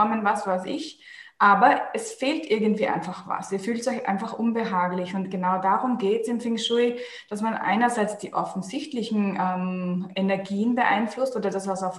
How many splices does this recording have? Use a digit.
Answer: 0